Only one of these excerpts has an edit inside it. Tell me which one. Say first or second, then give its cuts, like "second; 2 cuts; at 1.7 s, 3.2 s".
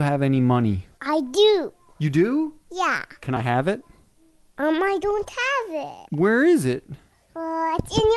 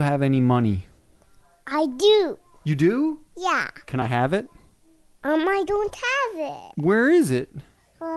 first; 1 cut; at 0.9 s